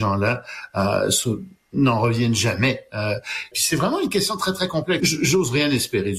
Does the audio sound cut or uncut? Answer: cut